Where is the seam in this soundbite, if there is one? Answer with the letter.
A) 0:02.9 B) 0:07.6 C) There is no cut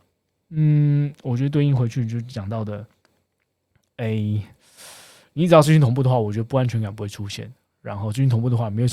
C